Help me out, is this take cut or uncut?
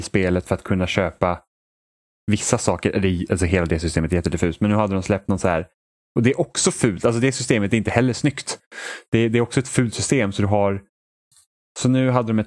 uncut